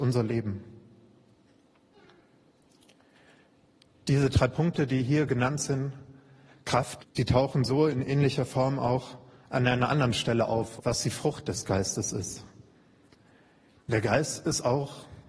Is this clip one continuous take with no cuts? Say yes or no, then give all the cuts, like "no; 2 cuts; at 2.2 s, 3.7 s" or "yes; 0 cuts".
no; 3 cuts; at 7.0 s, 10.8 s, 13.8 s